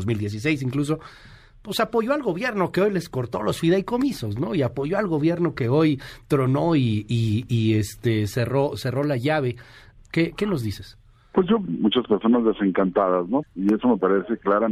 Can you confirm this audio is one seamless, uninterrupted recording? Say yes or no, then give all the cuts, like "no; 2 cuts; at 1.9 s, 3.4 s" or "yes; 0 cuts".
no; 3 cuts; at 10.0 s, 11.7 s, 13.4 s